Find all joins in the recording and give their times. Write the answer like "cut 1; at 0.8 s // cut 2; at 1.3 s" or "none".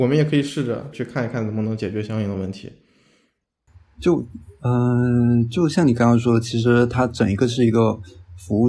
cut 1; at 0.9 s